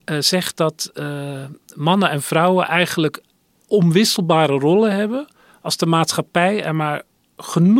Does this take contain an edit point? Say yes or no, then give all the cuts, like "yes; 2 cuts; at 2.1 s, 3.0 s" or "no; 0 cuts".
no; 0 cuts